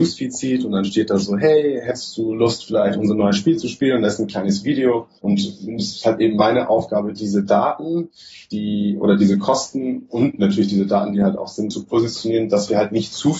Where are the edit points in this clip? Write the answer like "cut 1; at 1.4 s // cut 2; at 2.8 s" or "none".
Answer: cut 1; at 5.2 s // cut 2; at 11.7 s